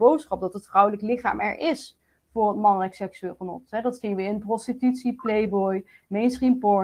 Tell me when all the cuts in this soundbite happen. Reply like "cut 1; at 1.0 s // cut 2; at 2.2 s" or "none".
none